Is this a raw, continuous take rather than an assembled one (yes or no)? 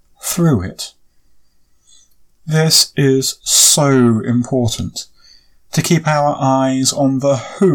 yes